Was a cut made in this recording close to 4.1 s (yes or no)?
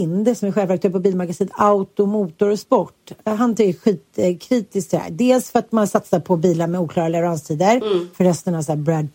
no